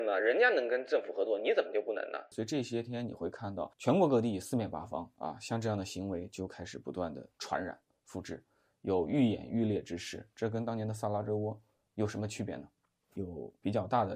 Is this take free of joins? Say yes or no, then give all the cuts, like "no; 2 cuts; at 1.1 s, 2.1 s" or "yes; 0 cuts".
no; 1 cut; at 2.3 s